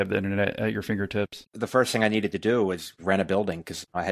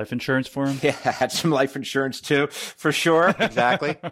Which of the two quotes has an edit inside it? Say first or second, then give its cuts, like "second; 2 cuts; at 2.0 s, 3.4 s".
first; 1 cut; at 1.4 s